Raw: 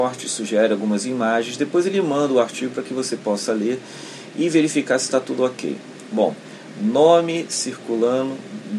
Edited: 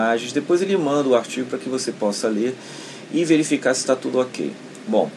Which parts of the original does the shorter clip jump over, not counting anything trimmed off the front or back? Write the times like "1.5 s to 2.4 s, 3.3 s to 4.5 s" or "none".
none